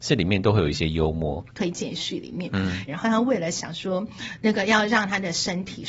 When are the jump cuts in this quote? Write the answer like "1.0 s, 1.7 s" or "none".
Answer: 1.5 s, 2.9 s